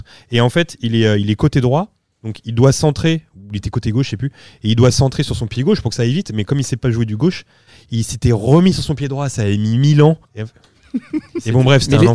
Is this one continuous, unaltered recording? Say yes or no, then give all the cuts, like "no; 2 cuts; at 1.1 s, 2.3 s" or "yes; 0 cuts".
no; 1 cut; at 10.2 s